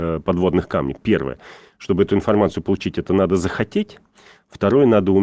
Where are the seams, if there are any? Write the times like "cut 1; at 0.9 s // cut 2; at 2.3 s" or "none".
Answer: none